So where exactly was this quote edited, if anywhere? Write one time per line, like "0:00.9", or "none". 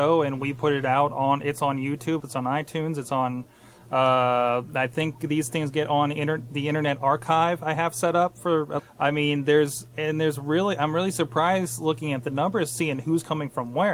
0:02.2
0:08.8